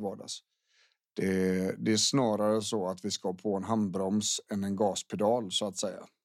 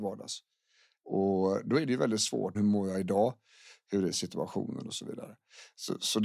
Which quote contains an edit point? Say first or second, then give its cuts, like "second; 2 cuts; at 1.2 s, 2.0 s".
second; 2 cuts; at 1.0 s, 2.5 s